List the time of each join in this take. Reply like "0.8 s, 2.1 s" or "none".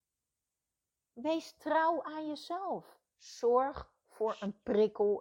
3.1 s

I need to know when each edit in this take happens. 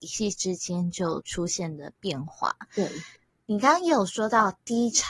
none

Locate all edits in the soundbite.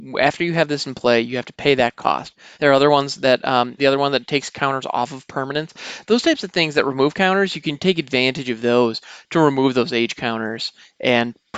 2.5 s, 3.8 s

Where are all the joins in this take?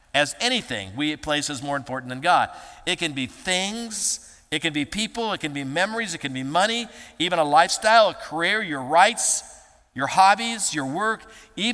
none

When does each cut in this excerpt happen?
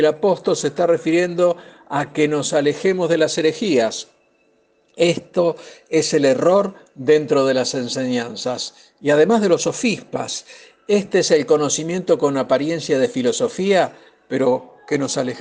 none

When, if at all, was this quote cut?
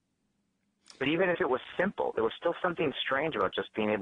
none

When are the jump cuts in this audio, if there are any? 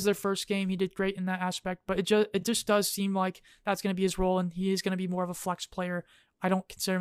none

